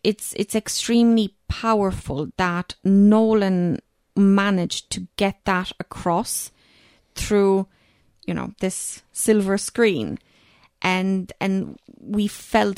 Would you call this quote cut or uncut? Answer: uncut